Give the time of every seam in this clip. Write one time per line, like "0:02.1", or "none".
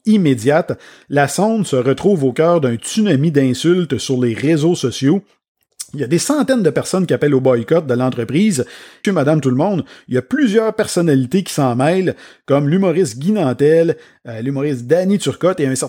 0:09.0